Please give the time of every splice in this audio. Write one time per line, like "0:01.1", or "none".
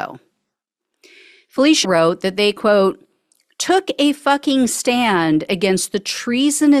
0:01.8